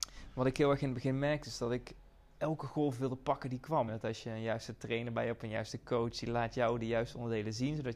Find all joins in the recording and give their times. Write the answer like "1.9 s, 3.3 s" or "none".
3.9 s

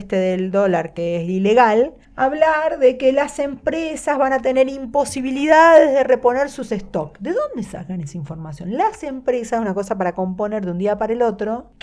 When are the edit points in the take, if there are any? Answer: none

